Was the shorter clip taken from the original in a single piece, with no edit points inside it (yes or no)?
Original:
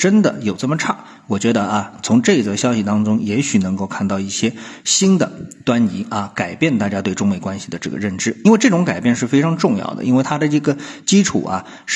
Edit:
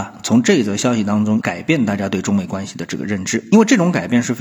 no